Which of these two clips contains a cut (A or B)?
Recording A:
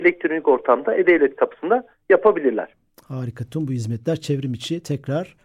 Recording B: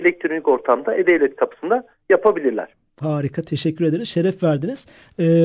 B